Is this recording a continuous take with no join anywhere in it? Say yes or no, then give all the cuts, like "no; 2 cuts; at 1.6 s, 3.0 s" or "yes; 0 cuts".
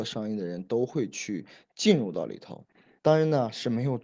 no; 1 cut; at 3.0 s